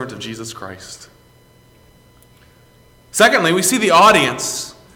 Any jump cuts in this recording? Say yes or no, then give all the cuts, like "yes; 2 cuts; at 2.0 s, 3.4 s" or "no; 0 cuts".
no; 0 cuts